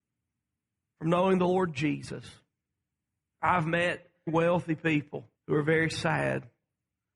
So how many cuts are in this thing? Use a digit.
2